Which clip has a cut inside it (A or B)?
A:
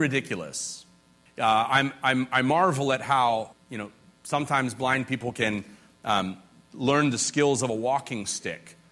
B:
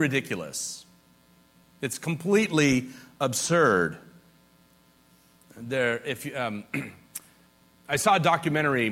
A